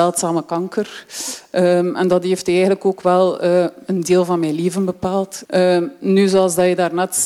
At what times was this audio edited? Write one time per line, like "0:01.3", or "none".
0:05.4